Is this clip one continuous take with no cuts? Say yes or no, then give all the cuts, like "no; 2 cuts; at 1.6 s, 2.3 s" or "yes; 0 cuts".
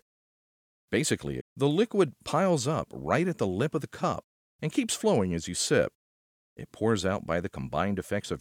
no; 1 cut; at 1.4 s